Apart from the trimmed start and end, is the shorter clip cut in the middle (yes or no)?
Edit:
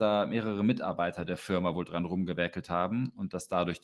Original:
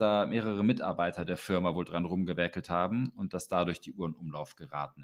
no